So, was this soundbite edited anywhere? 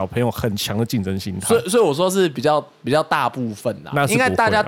no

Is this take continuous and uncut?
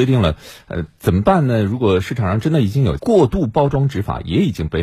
no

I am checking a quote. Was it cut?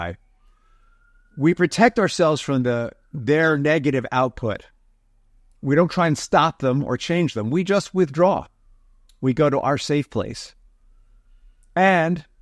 no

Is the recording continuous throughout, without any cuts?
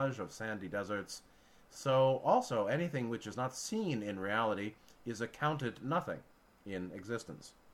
yes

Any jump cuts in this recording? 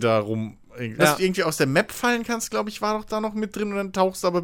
yes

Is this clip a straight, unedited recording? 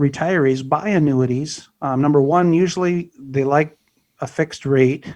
yes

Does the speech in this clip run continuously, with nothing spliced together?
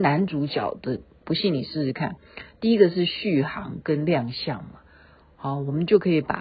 no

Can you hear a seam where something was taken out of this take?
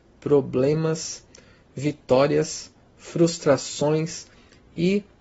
no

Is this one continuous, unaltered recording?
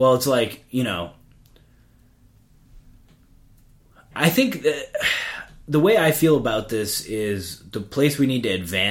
yes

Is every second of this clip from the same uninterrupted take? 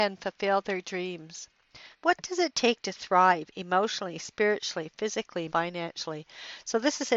no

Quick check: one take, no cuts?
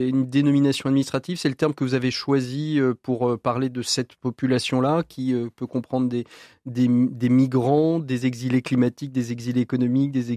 yes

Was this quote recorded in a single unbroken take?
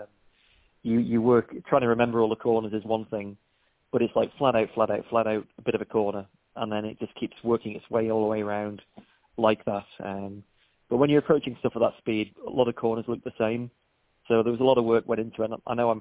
yes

